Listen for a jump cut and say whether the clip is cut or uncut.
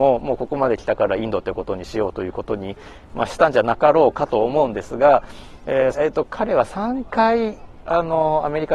cut